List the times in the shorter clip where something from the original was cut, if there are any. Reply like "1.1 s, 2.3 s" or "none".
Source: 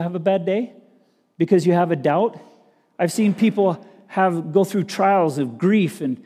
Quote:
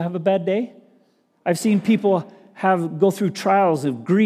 1.3 s